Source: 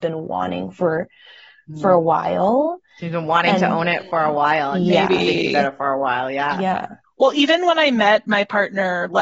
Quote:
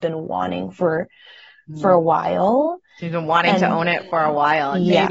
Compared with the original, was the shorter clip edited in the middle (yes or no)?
no